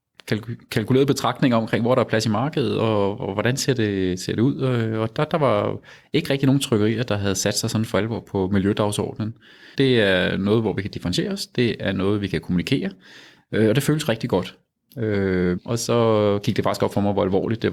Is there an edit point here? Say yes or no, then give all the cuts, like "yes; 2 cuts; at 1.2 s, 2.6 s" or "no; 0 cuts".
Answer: yes; 2 cuts; at 9.7 s, 15.6 s